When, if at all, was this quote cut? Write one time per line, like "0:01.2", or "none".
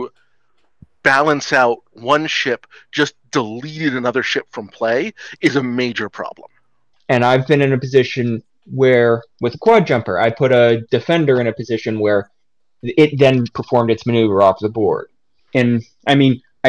0:06.9
0:15.4